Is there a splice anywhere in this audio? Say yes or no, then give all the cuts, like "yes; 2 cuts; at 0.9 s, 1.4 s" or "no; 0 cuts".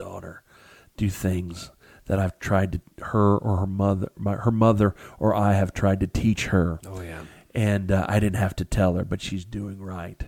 no; 0 cuts